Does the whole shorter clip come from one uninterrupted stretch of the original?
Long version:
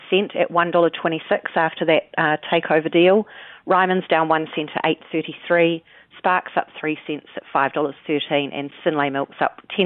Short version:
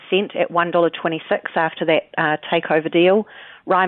yes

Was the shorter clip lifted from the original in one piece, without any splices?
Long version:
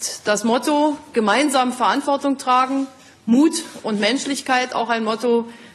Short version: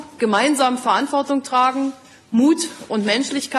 yes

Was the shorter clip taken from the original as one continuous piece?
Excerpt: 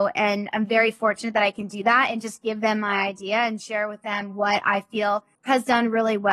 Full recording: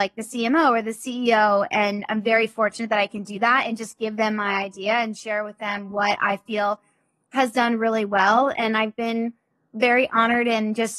no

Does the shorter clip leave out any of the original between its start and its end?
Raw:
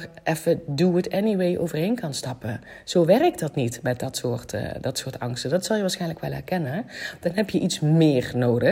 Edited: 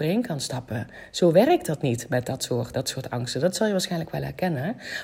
yes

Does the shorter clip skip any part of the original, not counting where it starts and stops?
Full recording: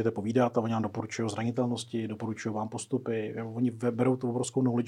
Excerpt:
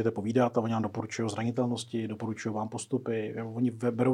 no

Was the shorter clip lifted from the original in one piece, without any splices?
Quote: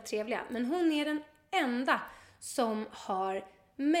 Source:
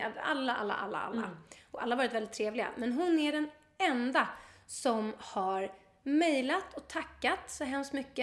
yes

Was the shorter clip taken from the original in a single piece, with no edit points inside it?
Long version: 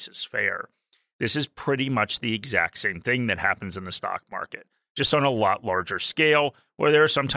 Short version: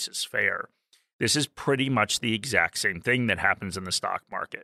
yes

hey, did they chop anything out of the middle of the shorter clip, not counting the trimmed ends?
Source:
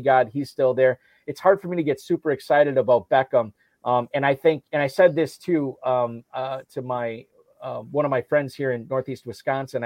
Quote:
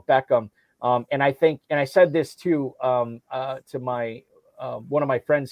no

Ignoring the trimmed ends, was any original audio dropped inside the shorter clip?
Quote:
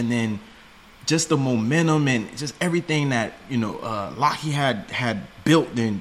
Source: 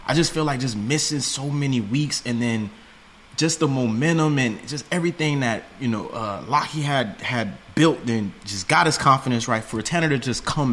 no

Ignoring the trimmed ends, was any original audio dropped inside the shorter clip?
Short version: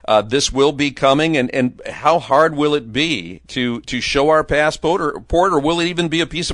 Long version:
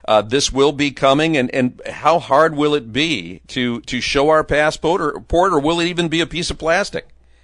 no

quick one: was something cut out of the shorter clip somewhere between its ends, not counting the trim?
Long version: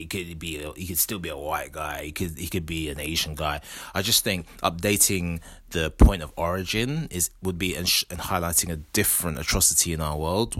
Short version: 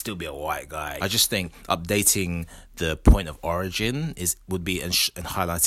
yes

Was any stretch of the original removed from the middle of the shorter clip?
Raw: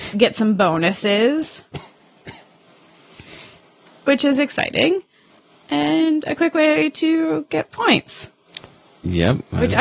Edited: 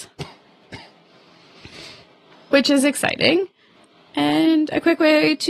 no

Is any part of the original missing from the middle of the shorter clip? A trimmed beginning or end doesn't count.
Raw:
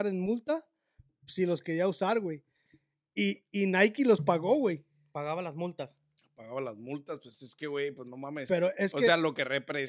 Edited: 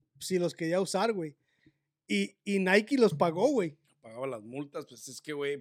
yes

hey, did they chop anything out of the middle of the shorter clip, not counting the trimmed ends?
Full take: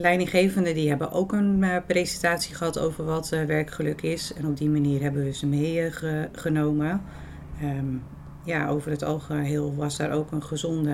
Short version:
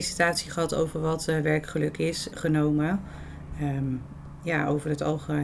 yes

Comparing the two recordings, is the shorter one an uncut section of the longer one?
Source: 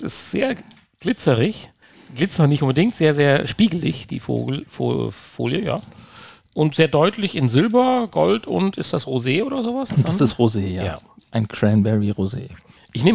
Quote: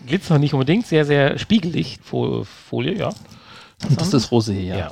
no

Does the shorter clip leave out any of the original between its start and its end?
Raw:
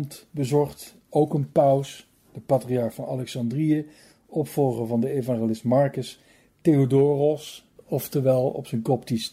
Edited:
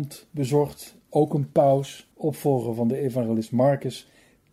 yes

